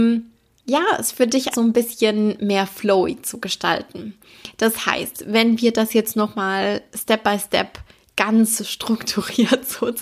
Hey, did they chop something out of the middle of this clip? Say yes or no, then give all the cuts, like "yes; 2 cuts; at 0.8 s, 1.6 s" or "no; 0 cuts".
yes; 1 cut; at 1.5 s